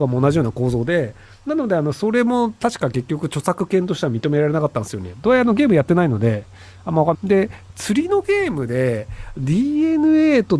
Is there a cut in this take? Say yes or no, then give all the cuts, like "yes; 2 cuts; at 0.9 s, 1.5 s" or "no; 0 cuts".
yes; 2 cuts; at 5.2 s, 7.1 s